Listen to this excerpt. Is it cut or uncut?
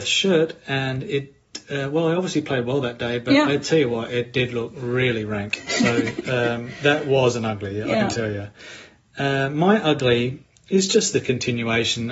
uncut